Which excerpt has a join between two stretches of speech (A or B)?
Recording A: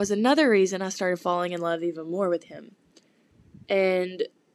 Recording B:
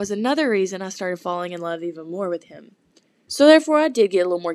B